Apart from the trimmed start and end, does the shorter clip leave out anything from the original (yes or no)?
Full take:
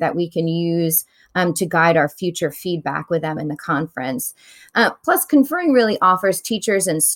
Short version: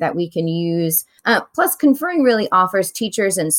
yes